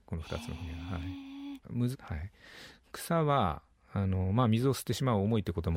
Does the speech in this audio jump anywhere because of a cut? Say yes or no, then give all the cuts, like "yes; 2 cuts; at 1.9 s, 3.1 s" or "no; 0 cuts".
yes; 1 cut; at 1.9 s